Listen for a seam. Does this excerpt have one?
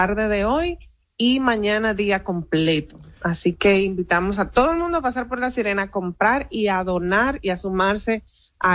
no; 0 cuts

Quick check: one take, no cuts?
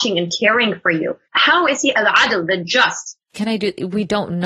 no; 2 cuts; at 1.2 s, 3.3 s

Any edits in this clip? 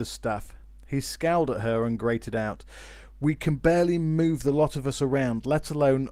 no; 0 cuts

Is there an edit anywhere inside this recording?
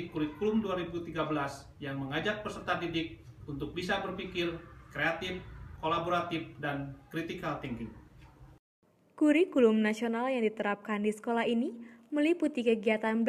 yes; 1 cut; at 5.8 s

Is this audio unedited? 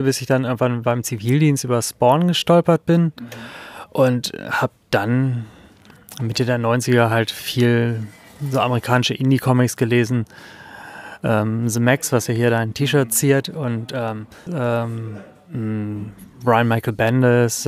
no; 1 cut; at 14.5 s

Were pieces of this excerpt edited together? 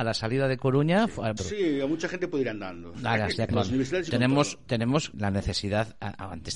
yes; 3 cuts; at 1.4 s, 3.5 s, 5.1 s

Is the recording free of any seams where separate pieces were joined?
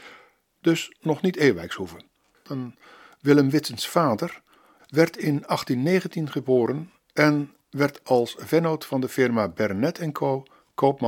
no; 2 cuts; at 2.4 s, 4.8 s

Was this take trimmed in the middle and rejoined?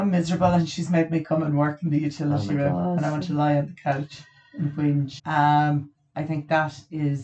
yes; 1 cut; at 5.2 s

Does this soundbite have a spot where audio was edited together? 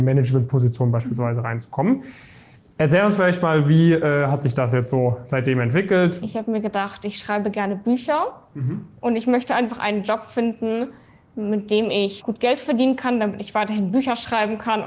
yes; 2 cuts; at 6.2 s, 12.2 s

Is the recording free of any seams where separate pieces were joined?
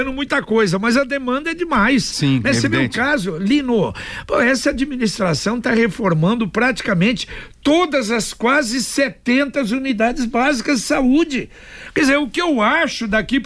yes; 0 cuts

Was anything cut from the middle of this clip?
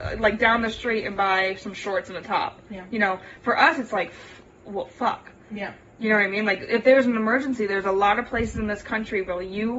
no; 0 cuts

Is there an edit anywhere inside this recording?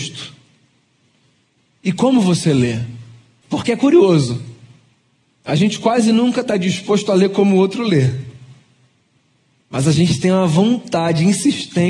yes; 1 cut; at 3.4 s

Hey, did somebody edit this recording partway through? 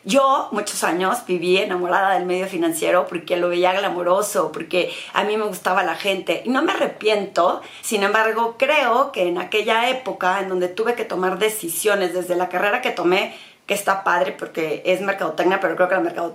no; 0 cuts

